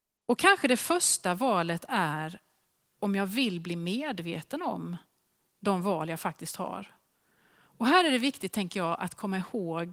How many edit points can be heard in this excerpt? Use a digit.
0